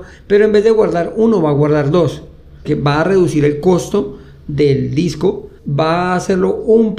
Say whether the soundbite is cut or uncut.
cut